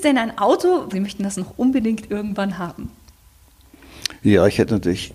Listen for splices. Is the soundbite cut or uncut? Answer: cut